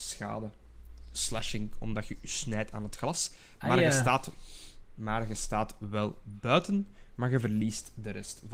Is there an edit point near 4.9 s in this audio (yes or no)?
no